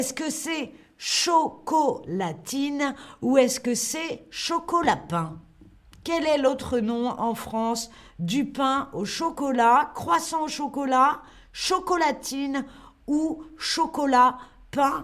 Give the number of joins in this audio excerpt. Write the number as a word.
zero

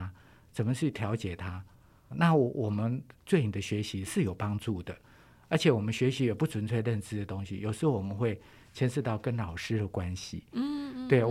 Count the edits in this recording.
two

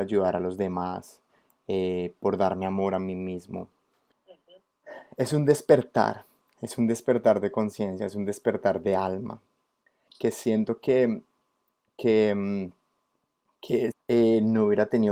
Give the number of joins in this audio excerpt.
three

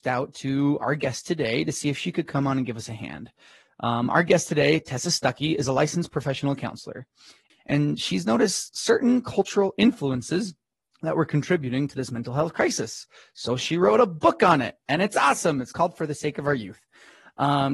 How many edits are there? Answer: one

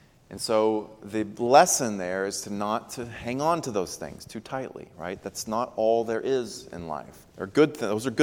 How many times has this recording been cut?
one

